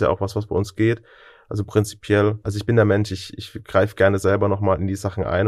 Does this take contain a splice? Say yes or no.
yes